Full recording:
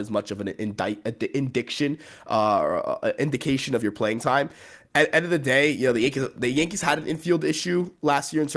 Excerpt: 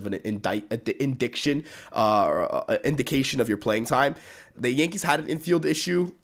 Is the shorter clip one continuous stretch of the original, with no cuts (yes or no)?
no